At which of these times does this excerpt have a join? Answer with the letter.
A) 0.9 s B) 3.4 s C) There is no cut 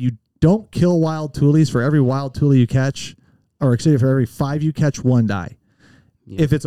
C